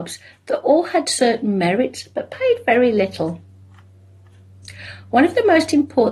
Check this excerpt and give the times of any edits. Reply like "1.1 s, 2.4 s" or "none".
none